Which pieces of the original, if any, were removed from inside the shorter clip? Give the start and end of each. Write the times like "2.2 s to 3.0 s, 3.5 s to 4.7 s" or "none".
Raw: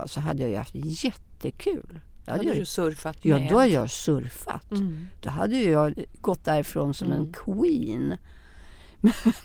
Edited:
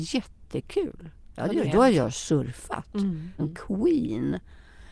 2.5 s to 3.4 s, 5.2 s to 7.2 s